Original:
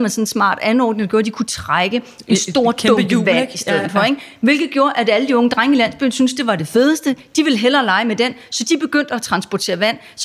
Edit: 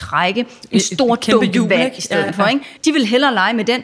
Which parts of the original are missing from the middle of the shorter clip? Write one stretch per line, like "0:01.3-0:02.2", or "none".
0:04.3-0:07.3